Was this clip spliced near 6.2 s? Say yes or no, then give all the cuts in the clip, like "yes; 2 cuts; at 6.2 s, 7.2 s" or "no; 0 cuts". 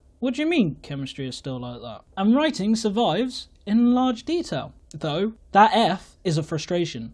yes; 1 cut; at 6.2 s